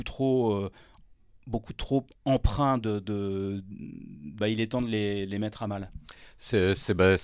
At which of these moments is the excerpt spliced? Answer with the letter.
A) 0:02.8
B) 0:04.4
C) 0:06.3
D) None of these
B